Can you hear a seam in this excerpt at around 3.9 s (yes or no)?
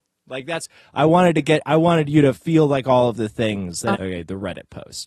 yes